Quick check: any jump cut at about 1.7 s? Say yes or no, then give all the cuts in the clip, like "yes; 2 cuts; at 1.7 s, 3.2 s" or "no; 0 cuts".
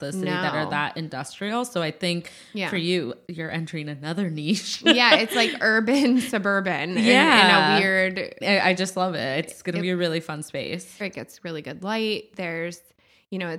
no; 2 cuts; at 8.4 s, 11.0 s